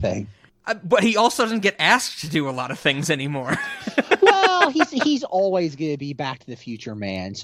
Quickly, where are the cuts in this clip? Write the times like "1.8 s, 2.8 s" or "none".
none

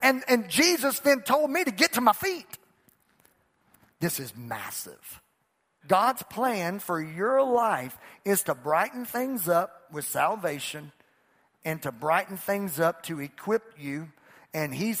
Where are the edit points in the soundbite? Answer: 5.8 s

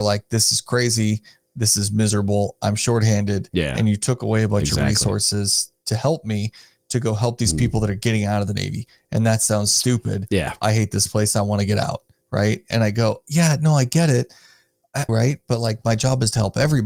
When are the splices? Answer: 15.1 s

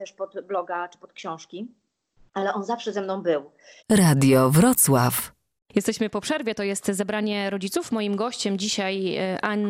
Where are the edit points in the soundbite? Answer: 3.8 s

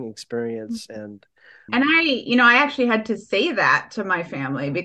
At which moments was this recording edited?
1.7 s

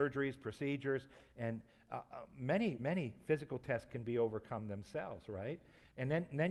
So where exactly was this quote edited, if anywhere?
none

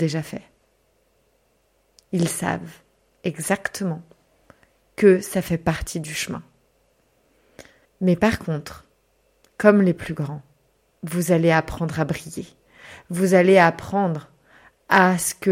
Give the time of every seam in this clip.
7.9 s

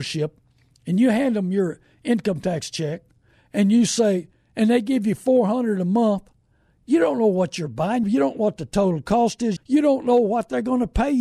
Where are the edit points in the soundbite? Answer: 8.0 s, 9.6 s

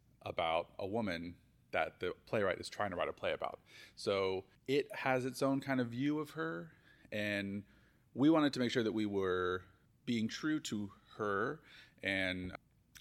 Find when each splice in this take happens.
none

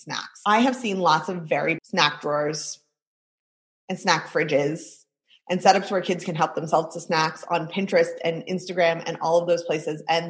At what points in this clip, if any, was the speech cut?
1.8 s

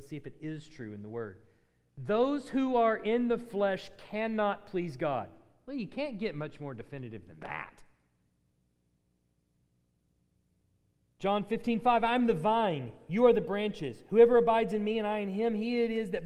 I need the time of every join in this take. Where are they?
none

